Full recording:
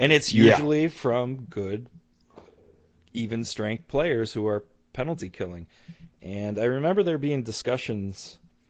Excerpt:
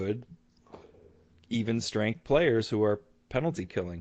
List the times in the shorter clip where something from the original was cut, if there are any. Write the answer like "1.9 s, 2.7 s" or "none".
none